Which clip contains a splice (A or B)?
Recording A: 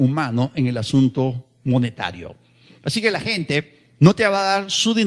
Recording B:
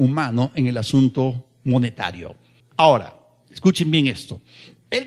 B